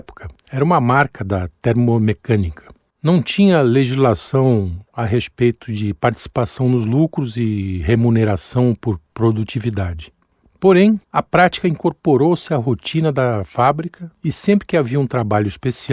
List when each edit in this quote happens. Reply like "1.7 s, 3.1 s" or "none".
2.9 s, 11.0 s